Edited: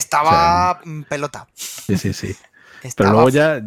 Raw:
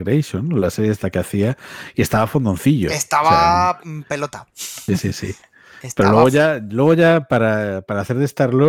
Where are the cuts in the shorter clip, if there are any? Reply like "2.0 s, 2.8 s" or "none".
none